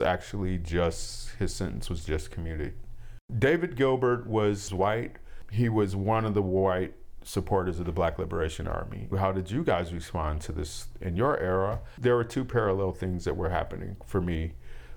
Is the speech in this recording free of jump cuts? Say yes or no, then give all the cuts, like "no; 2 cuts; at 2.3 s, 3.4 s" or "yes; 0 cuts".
no; 1 cut; at 9.1 s